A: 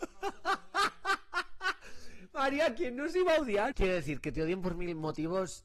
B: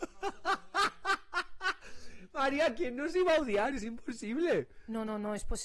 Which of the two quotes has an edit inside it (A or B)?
A